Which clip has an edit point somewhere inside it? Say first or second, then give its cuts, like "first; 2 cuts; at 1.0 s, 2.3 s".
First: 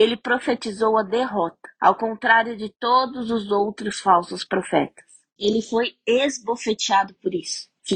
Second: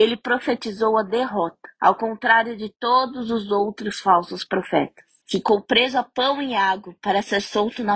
second; 1 cut; at 5.2 s